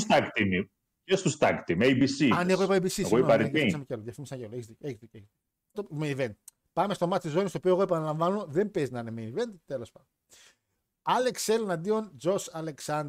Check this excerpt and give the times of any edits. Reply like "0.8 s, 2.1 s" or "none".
5.7 s